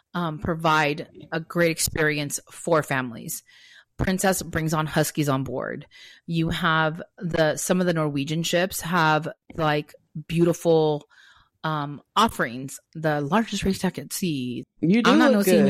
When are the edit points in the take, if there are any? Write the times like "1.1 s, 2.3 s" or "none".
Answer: 12.9 s, 14.6 s